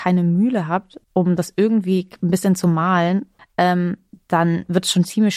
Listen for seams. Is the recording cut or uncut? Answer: cut